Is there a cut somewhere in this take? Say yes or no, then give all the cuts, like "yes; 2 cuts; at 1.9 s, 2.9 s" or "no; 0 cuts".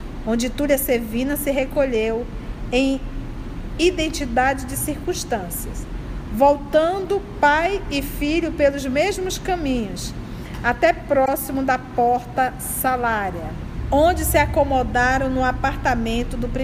yes; 1 cut; at 6.3 s